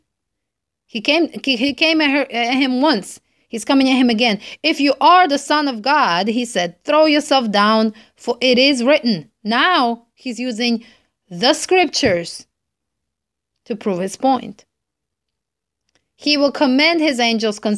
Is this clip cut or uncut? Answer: uncut